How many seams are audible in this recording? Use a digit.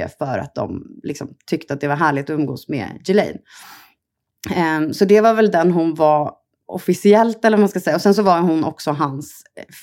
0